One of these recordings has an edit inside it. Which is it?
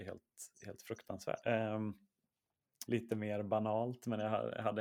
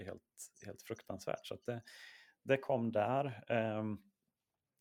first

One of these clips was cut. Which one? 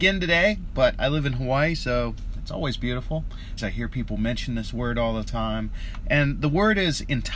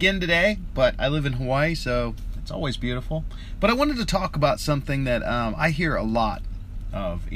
first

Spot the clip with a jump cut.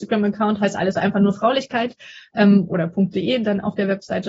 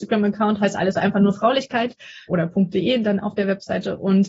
second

